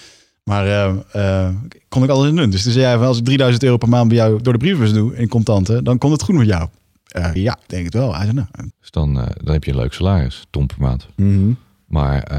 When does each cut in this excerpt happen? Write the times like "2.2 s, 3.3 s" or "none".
7.4 s, 8.7 s